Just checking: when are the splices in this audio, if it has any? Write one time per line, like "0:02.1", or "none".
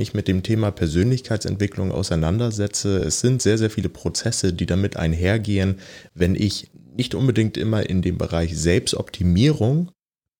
none